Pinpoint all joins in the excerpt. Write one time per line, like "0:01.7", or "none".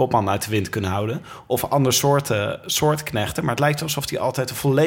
none